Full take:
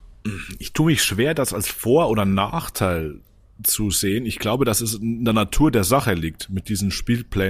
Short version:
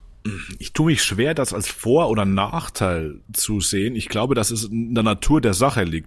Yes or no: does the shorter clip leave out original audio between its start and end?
yes